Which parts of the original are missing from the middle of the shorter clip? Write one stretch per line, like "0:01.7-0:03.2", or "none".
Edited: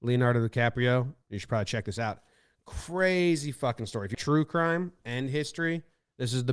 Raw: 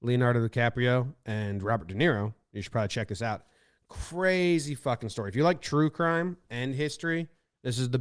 0:01.2-0:02.5
0:05.4-0:05.6